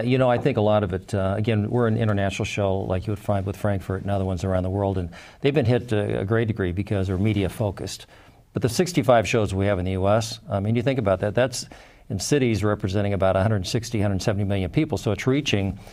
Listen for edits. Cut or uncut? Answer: uncut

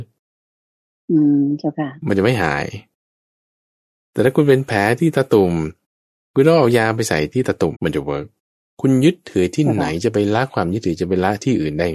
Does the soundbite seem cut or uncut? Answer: cut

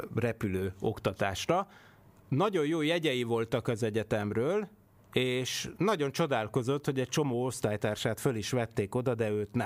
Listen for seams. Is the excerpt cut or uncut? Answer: uncut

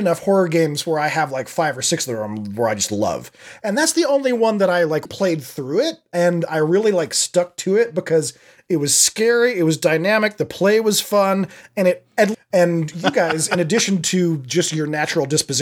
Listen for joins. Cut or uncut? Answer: cut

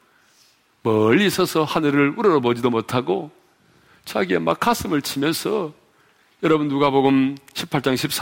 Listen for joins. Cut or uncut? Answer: uncut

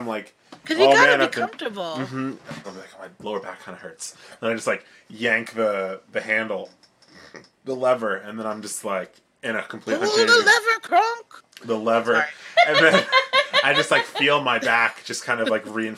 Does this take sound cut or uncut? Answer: cut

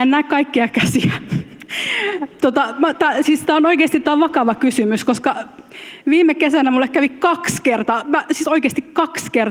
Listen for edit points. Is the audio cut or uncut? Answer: uncut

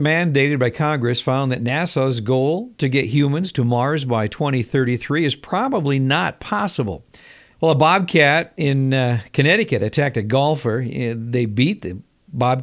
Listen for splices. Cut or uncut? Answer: cut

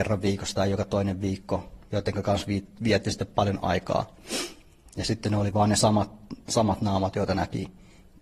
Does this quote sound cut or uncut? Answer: cut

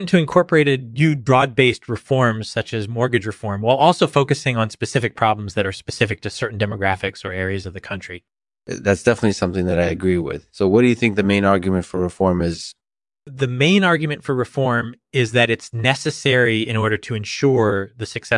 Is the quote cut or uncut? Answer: uncut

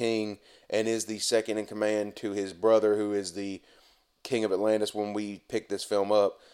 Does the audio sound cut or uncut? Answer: uncut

